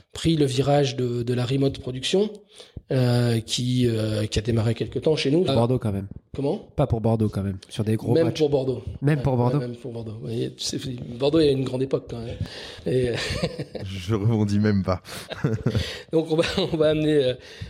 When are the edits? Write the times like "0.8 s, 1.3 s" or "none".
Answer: 5.5 s